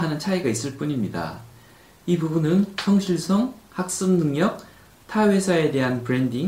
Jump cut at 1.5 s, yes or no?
no